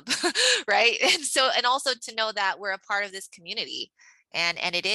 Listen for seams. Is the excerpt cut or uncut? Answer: uncut